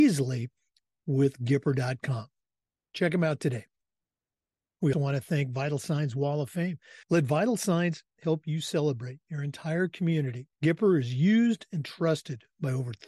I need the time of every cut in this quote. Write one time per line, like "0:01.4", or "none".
0:04.9
0:07.0
0:10.5